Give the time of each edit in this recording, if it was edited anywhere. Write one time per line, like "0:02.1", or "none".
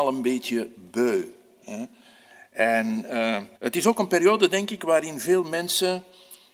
0:03.6